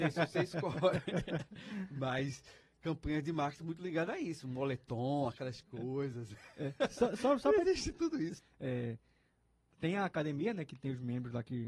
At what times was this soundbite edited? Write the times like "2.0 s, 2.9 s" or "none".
8.4 s